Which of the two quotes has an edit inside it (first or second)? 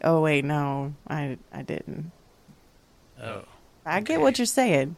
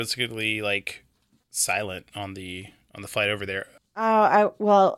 second